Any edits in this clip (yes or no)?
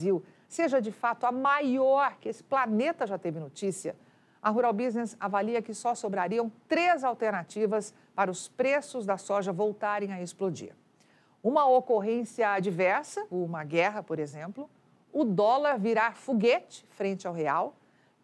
yes